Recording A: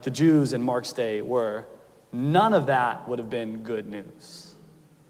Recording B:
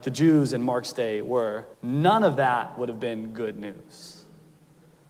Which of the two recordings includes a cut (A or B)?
B